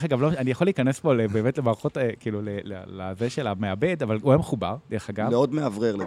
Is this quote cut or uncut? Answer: cut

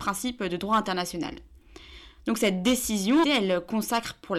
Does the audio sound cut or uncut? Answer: cut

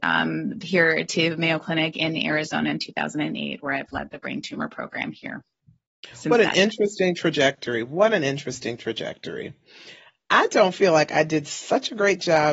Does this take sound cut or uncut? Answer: uncut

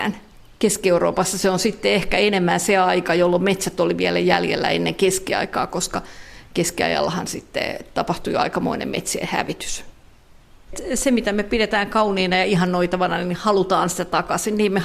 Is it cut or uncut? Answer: uncut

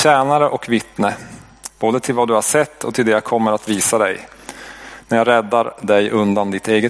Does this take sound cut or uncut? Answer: uncut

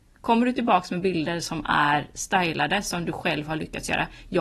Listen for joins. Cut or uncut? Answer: uncut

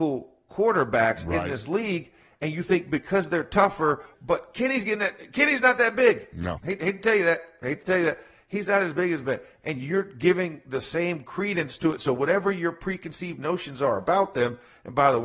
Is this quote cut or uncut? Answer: cut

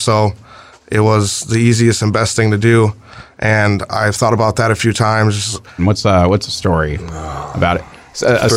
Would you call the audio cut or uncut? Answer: cut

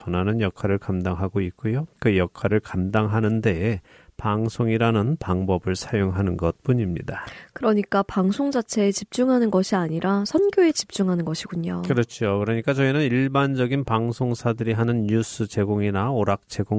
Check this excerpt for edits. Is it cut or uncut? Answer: uncut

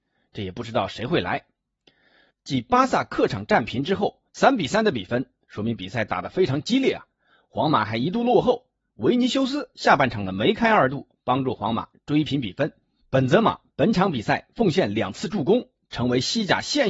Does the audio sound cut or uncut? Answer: cut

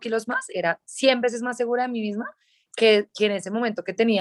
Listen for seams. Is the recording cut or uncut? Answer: uncut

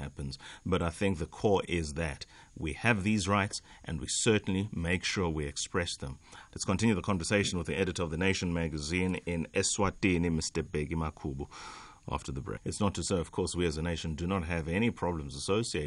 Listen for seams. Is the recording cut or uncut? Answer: cut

